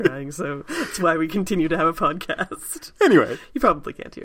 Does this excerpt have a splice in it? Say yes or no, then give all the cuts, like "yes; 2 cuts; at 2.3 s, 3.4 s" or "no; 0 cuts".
no; 0 cuts